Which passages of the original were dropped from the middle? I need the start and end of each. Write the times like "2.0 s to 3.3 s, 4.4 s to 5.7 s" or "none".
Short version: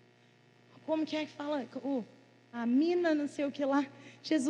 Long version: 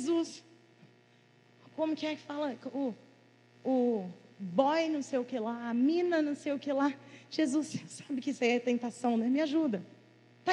3.4 s to 5.6 s